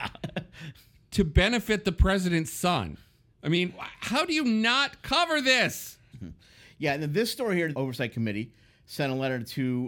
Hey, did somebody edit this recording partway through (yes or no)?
yes